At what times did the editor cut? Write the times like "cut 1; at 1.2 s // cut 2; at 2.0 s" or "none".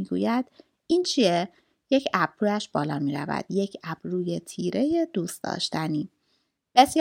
none